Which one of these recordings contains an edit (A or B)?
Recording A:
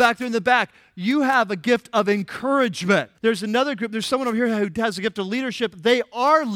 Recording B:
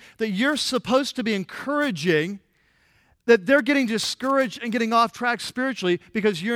A